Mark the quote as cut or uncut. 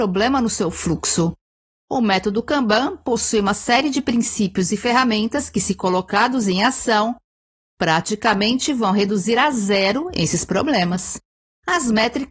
uncut